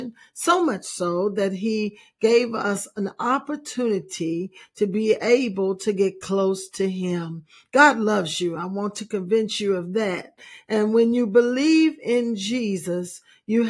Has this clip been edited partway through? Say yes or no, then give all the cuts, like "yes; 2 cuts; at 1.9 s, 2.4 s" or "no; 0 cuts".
no; 0 cuts